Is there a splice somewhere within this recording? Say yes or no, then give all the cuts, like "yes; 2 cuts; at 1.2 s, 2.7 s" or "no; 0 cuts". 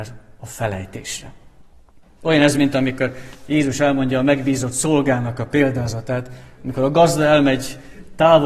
yes; 1 cut; at 2.2 s